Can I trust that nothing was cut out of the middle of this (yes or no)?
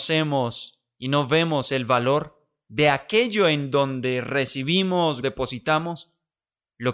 no